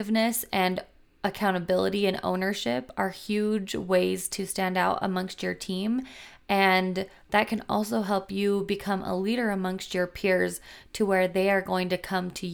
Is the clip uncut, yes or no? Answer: yes